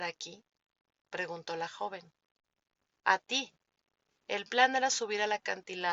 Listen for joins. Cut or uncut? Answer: cut